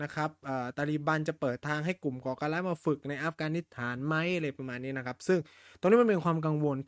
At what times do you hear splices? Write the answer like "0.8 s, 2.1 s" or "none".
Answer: none